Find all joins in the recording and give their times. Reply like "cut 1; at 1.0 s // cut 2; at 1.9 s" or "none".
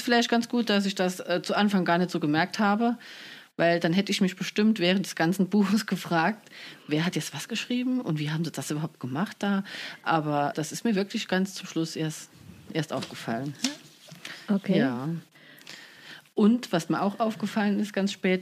cut 1; at 10.5 s